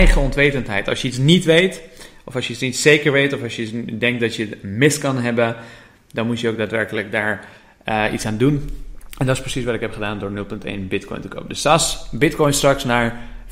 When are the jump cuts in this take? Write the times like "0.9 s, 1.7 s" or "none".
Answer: none

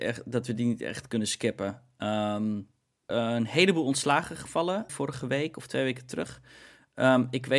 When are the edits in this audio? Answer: 3.1 s, 4.9 s

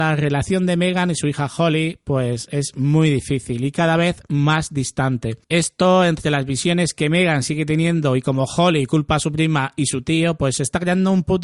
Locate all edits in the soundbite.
5.4 s

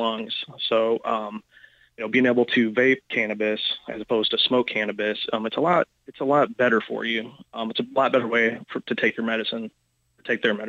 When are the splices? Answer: none

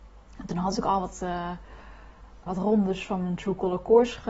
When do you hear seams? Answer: 2.5 s

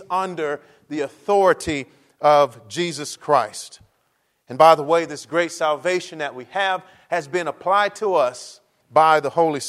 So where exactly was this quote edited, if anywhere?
none

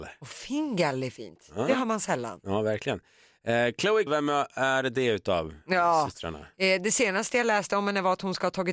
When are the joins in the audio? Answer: 4.1 s

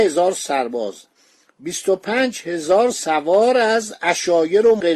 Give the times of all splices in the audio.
none

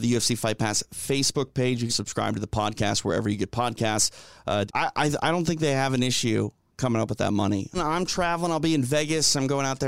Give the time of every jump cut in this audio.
1.9 s, 4.7 s, 7.7 s

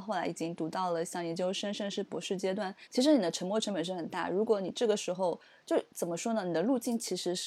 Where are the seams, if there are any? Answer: 2.8 s

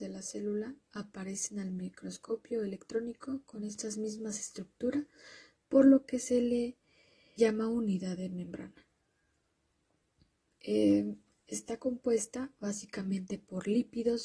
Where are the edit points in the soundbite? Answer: 7.4 s

